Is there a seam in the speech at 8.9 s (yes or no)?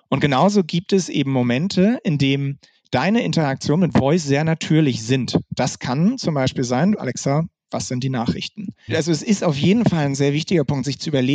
yes